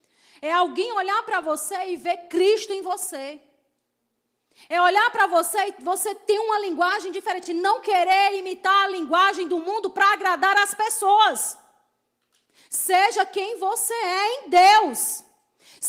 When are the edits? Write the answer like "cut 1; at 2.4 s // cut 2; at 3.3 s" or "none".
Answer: none